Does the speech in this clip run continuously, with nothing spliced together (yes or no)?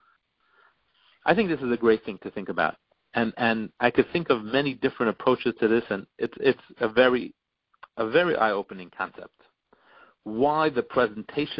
yes